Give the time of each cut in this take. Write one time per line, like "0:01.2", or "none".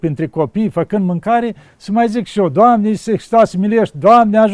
none